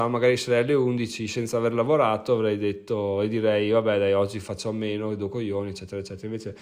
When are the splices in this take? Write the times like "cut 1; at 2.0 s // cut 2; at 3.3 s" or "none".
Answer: none

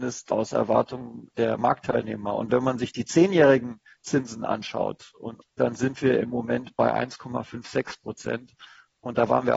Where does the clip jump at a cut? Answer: cut 1; at 5.4 s

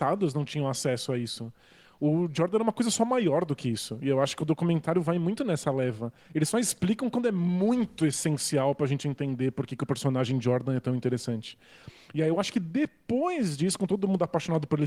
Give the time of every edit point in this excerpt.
cut 1; at 6.2 s

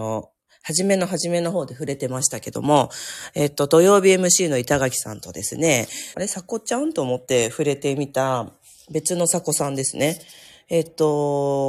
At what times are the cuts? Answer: cut 1; at 6.1 s

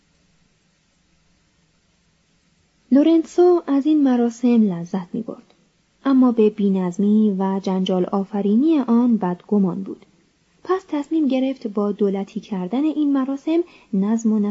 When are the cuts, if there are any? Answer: none

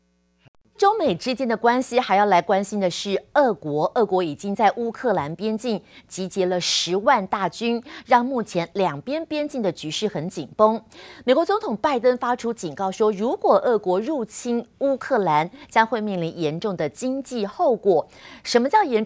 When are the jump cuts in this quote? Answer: none

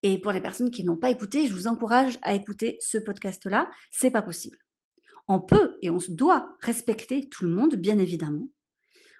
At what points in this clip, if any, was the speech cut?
cut 1; at 3.9 s

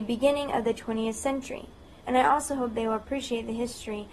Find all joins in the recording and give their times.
cut 1; at 2.0 s

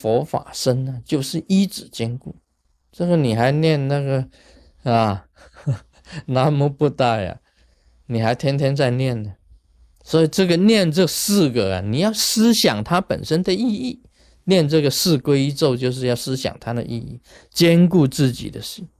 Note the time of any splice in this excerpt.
cut 1; at 2.8 s

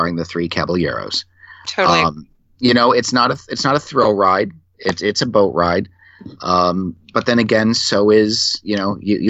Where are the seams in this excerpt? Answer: none

